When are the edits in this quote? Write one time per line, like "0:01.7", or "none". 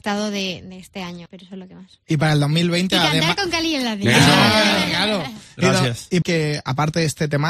0:01.3
0:06.2